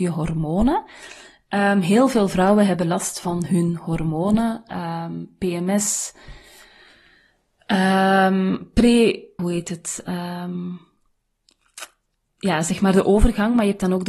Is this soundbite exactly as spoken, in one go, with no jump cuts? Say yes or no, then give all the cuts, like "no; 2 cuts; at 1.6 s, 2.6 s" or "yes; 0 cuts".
no; 1 cut; at 9.4 s